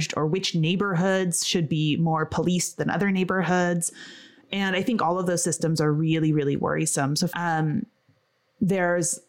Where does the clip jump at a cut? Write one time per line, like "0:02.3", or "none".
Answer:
0:07.3